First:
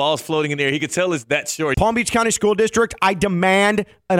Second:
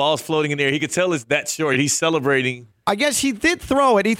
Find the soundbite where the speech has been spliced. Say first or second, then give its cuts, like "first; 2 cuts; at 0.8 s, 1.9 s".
first; 1 cut; at 1.7 s